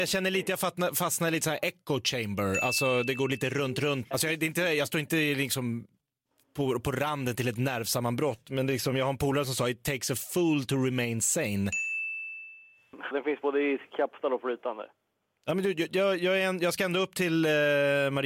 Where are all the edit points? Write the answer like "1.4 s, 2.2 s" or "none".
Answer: 13.1 s